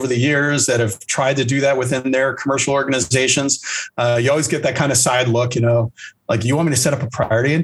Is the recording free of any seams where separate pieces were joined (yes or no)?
yes